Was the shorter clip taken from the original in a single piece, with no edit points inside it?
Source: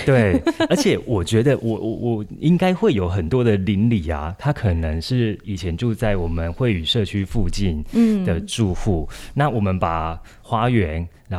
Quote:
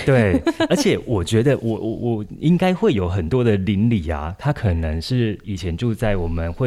yes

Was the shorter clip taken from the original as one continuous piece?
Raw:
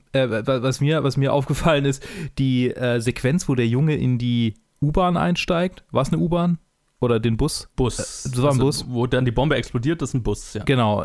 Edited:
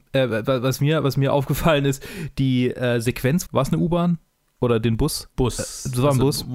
no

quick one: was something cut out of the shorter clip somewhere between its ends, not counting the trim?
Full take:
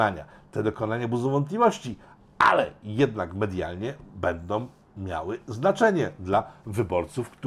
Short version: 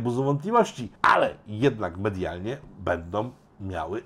yes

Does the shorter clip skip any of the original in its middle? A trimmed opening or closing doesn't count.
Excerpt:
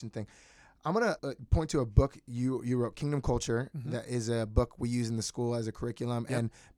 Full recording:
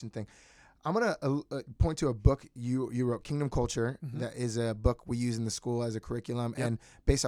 yes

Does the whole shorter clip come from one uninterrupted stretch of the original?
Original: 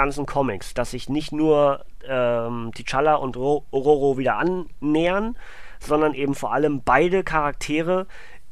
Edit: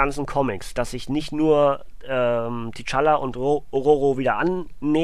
yes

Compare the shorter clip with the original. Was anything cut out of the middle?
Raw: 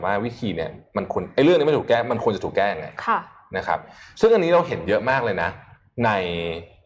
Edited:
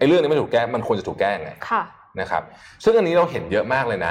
no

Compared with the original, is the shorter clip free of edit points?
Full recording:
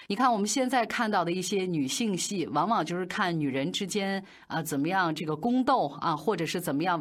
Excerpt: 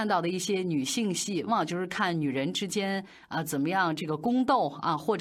no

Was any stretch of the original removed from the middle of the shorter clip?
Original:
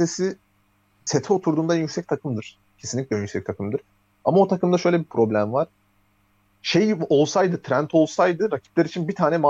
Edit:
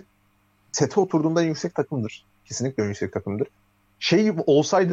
yes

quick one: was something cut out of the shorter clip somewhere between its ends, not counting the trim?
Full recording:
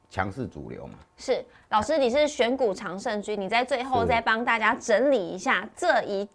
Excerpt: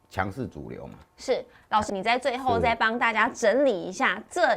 yes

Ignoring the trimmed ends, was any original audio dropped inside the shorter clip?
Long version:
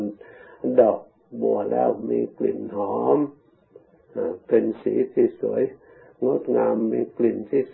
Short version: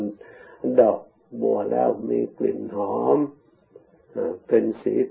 no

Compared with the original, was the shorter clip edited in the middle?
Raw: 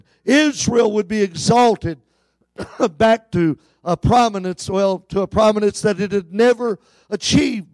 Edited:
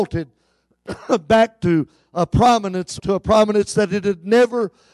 yes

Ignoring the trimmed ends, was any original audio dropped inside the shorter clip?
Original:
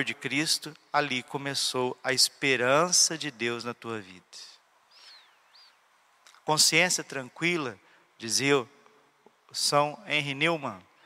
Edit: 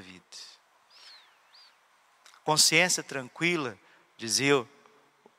no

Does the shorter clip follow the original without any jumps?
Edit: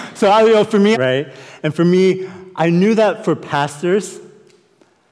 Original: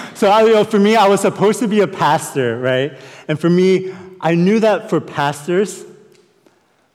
no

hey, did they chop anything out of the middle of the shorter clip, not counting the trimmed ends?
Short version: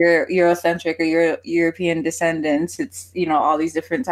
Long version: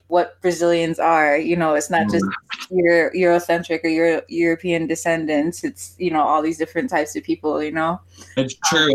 no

